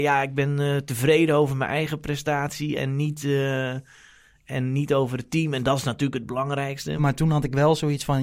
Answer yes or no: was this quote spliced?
yes